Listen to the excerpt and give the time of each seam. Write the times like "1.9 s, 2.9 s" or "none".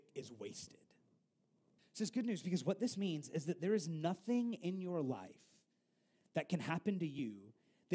1.8 s